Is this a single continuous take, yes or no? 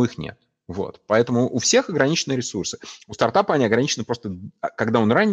yes